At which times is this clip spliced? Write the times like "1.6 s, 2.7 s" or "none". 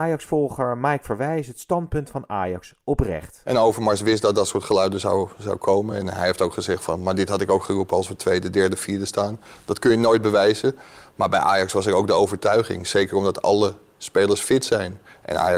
none